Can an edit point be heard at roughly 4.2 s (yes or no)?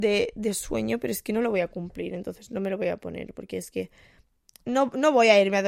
no